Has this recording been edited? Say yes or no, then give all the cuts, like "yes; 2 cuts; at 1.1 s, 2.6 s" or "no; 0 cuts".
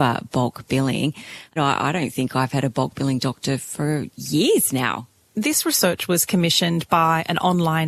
yes; 1 cut; at 1.6 s